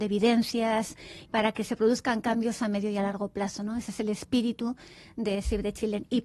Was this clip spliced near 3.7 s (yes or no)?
no